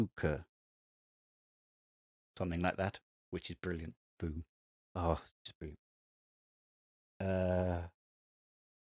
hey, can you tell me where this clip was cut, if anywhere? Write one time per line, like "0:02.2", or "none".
0:04.1